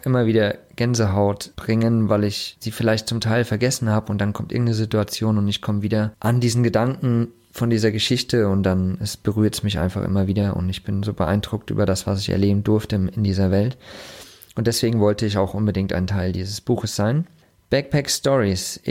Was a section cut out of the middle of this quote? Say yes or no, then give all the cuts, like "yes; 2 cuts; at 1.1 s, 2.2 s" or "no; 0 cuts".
no; 0 cuts